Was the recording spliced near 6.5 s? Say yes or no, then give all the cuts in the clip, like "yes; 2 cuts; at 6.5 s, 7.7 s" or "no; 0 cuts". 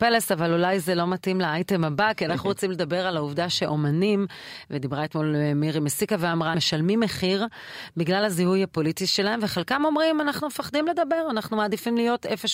yes; 1 cut; at 6.5 s